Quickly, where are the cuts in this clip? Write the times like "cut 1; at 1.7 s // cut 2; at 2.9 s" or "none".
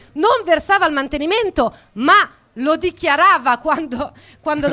none